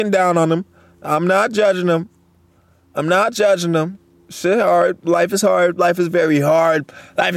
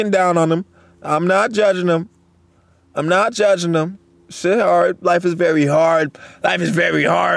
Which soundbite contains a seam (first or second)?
second